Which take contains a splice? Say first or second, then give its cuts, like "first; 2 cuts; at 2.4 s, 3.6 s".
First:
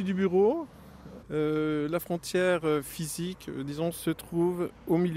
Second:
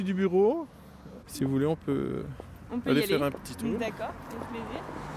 second; 1 cut; at 1.3 s